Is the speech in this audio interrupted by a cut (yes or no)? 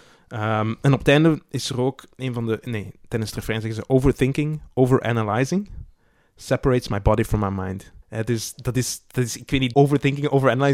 yes